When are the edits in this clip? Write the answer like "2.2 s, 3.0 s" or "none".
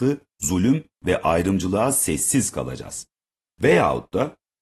3.4 s